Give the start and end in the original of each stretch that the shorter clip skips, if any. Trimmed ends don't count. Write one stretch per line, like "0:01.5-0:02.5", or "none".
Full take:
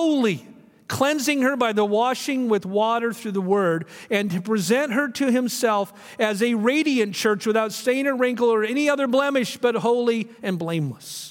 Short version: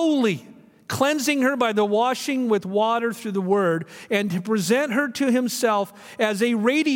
none